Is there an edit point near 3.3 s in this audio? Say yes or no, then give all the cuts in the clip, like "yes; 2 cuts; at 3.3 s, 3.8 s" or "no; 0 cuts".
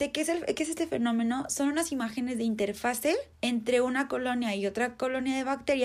yes; 1 cut; at 3.3 s